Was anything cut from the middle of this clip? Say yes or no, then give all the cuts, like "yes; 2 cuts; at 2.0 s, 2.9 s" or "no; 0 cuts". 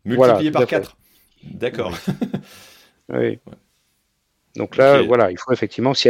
no; 0 cuts